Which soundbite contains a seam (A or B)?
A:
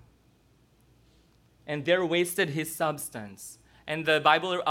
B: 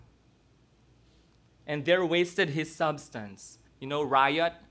B